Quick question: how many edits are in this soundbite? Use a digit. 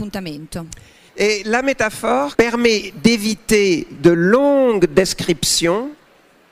2